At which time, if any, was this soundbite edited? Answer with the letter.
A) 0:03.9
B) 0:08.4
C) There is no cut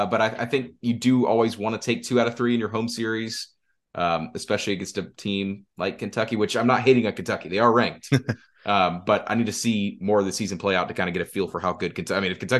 C